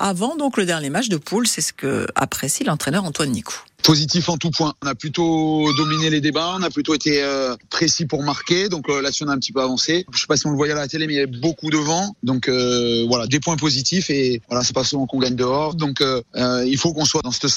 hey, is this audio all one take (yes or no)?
no